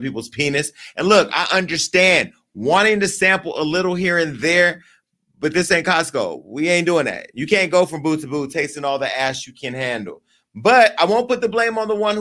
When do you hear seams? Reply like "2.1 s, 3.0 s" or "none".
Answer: none